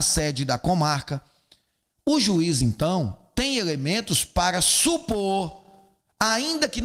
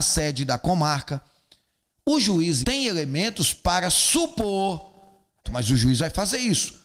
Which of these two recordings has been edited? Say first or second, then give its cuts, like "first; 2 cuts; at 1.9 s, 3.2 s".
second; 2 cuts; at 2.6 s, 5.4 s